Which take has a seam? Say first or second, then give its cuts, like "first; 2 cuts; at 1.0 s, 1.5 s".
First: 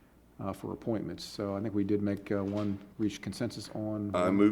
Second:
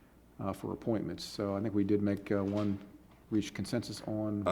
first; 1 cut; at 2.9 s